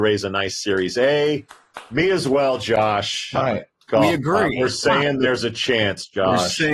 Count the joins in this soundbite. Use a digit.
1